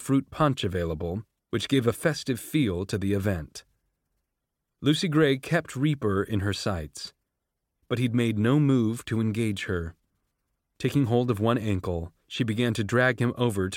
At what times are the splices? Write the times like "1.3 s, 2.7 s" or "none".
10.7 s, 12.2 s